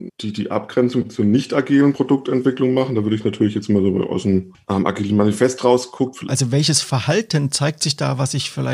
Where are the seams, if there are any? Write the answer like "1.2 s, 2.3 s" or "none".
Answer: 6.3 s